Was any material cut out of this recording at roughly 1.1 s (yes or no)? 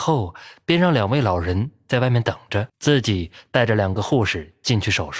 no